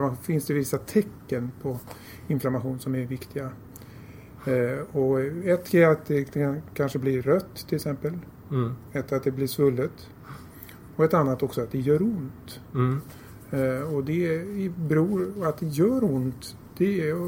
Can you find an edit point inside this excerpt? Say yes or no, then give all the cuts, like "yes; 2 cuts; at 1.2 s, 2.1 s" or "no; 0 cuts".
no; 0 cuts